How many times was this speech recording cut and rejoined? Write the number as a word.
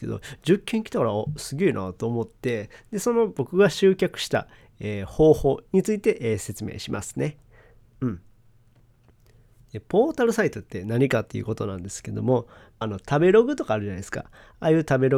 two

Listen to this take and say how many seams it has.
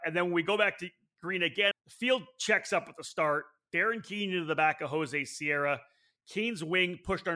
one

